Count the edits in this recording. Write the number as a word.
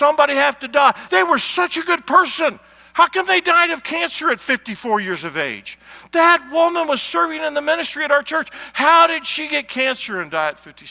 one